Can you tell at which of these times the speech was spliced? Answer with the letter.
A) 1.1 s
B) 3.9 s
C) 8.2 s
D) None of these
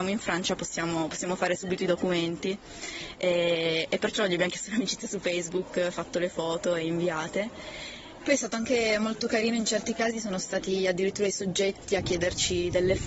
C